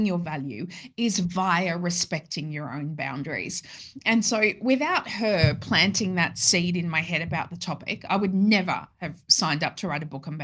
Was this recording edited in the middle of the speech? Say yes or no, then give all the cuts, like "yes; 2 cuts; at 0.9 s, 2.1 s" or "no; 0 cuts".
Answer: no; 0 cuts